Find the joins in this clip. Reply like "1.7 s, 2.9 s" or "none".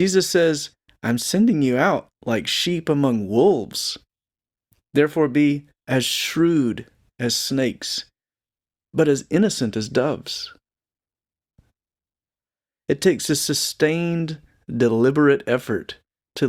none

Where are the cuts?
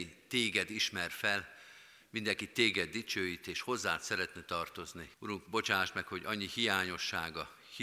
5.1 s

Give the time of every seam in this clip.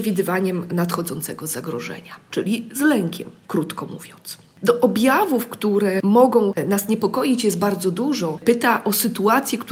8.4 s

